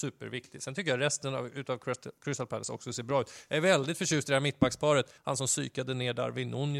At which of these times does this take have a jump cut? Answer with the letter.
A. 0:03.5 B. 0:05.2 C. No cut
B